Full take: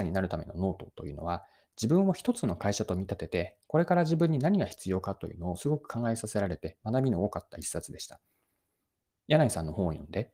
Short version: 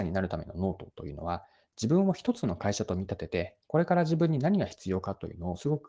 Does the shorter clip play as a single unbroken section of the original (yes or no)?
yes